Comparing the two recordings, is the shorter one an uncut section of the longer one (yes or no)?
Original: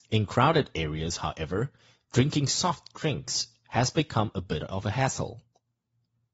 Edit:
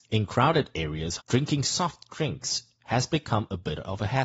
no